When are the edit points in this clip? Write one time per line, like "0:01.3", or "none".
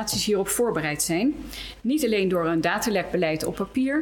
none